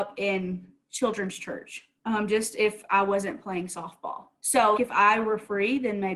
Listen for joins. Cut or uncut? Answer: cut